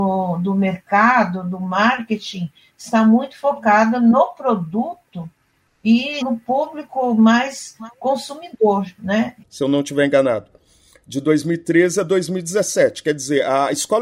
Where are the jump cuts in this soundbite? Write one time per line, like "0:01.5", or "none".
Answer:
0:06.2
0:09.4